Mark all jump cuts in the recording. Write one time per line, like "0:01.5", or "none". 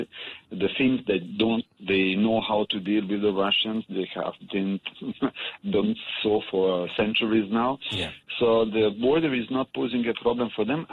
none